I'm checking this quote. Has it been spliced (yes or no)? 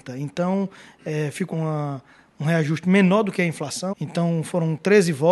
yes